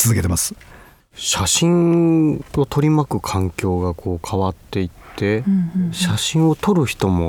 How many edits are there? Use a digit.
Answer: 1